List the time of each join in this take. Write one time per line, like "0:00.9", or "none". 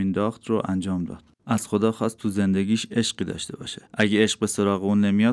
0:01.4
0:03.9

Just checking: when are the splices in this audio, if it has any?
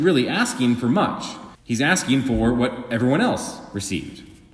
0:01.6

